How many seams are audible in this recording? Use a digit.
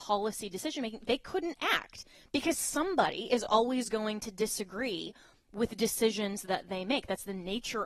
0